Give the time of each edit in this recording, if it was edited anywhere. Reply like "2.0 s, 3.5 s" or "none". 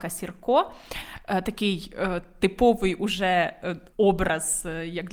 3.9 s